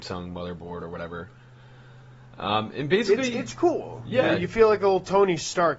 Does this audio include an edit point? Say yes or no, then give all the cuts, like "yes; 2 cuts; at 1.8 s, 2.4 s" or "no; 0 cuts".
no; 0 cuts